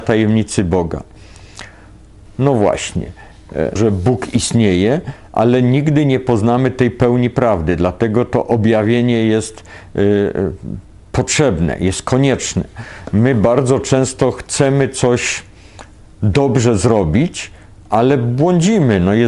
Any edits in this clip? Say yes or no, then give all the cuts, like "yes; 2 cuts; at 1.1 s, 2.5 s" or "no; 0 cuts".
yes; 2 cuts; at 2.3 s, 3.8 s